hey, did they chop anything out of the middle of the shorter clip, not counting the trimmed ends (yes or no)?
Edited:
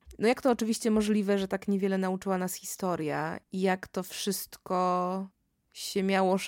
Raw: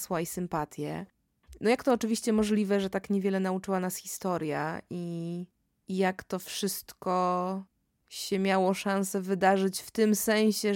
yes